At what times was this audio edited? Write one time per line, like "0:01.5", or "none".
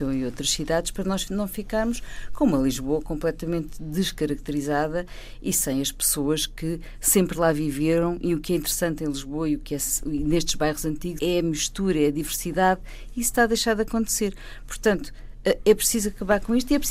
0:11.2